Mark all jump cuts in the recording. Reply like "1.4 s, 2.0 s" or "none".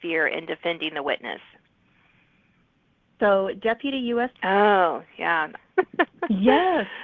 4.3 s, 5.6 s